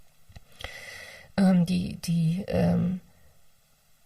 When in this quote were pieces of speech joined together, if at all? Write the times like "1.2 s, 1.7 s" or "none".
none